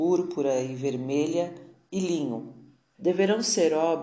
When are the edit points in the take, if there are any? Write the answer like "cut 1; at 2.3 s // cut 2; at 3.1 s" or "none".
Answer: cut 1; at 2.9 s